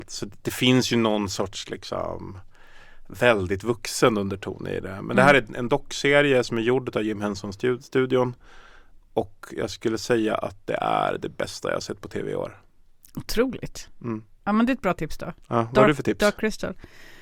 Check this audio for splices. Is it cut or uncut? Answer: uncut